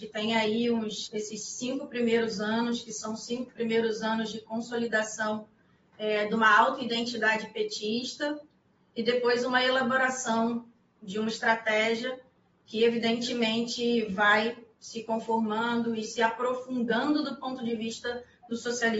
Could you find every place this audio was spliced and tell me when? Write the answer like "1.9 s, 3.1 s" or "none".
none